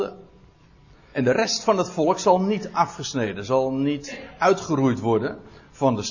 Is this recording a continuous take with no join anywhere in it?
no; 1 cut; at 1.1 s

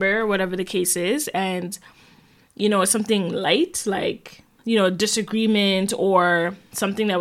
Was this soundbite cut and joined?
no; 0 cuts

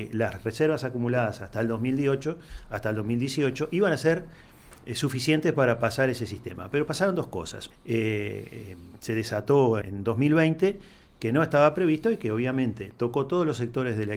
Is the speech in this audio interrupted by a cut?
yes; 2 cuts; at 7.7 s, 9.8 s

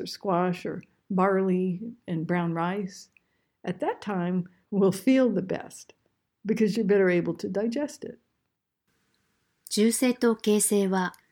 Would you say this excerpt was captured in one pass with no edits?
yes; 0 cuts

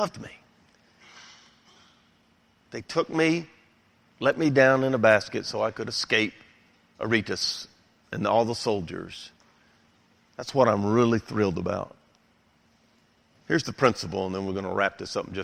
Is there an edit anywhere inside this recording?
no; 0 cuts

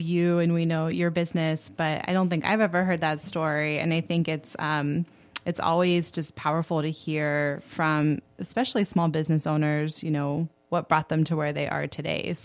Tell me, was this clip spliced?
no; 0 cuts

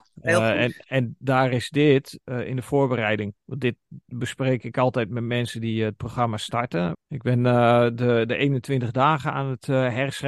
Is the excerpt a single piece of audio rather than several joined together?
no; 1 cut; at 6.9 s

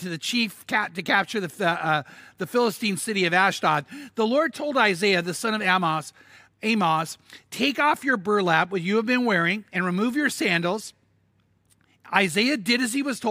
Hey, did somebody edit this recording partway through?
no; 0 cuts

